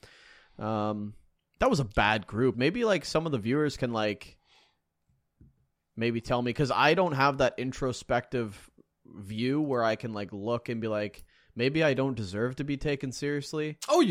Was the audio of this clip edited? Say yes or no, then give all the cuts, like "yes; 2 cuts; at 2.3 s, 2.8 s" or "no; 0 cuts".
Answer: yes; 1 cut; at 2.5 s